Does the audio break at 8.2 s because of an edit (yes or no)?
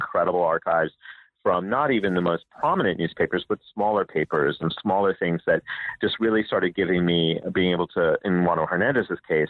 no